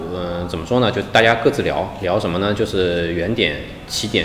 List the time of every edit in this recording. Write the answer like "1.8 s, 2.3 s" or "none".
none